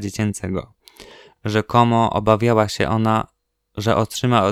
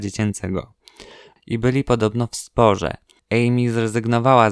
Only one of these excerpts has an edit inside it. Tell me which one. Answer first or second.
second